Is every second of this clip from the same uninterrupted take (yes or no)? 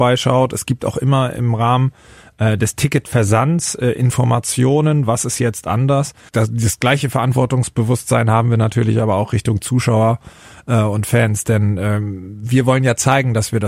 no